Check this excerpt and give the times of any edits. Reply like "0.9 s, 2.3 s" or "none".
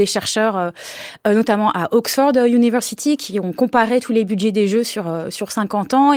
none